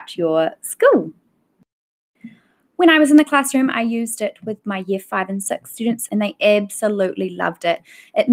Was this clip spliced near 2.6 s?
no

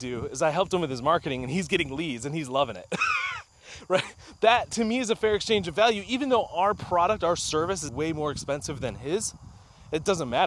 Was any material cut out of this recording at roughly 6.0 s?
no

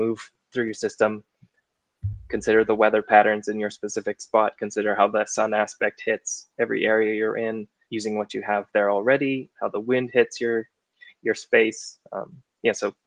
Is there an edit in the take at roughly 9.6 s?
yes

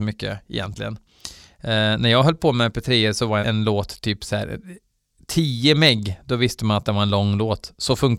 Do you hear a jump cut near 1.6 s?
no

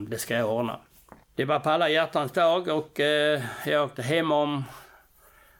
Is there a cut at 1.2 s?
yes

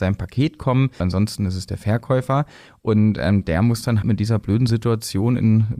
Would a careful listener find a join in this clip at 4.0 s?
yes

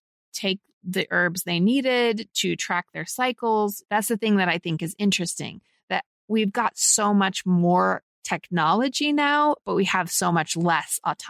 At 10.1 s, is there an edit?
no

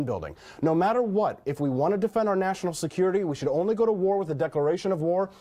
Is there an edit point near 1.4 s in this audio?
no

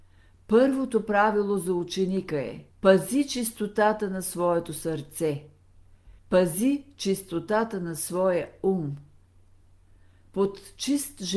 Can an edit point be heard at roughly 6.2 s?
yes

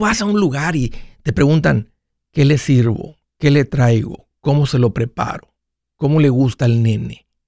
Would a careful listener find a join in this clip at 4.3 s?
no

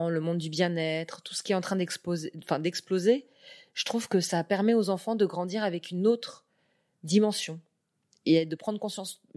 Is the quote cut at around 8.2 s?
no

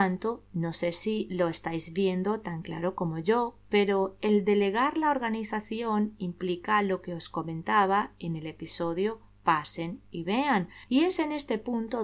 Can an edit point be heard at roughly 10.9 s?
yes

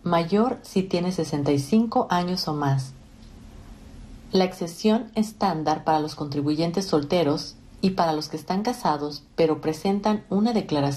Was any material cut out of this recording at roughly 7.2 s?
no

